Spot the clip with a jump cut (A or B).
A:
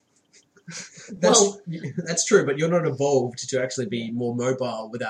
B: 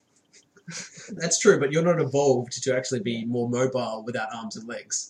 B